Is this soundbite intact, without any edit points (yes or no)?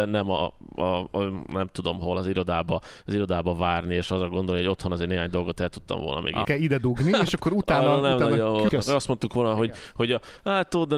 no